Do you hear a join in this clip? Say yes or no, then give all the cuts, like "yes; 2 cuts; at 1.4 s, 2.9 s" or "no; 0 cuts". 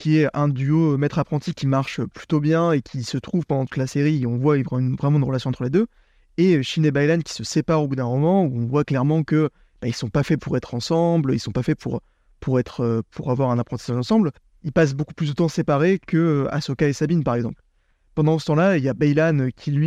no; 0 cuts